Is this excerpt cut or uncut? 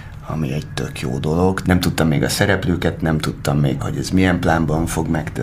cut